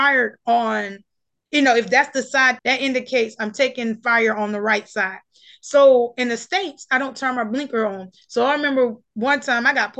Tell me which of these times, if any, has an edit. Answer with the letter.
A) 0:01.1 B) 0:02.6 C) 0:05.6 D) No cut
B